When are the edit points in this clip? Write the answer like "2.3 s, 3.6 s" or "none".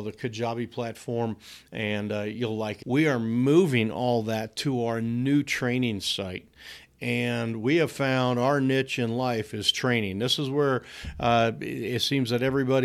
2.8 s